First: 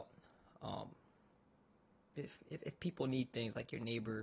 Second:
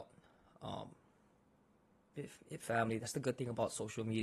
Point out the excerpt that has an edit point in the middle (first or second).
second